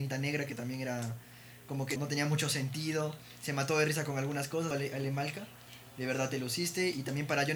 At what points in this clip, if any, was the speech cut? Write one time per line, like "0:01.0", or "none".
0:02.0
0:04.7